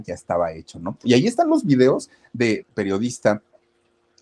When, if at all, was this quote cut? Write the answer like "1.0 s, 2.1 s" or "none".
1.0 s, 2.6 s

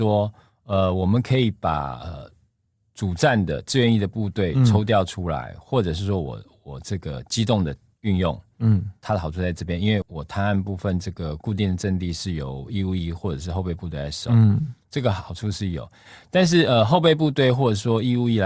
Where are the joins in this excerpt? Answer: 10.0 s

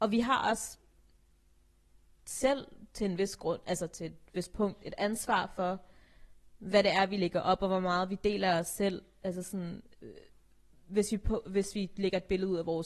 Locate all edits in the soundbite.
none

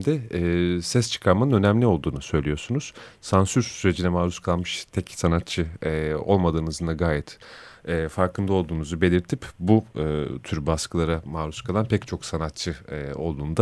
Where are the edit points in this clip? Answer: none

